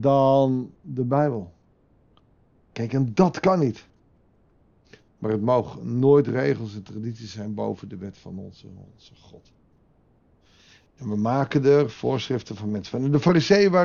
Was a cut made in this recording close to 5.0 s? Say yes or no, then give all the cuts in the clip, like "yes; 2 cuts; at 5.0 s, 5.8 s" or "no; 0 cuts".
yes; 1 cut; at 5.0 s